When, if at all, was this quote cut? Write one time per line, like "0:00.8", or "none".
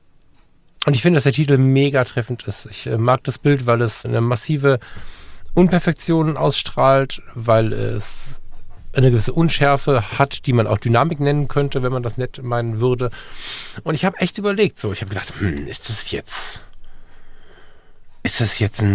0:04.0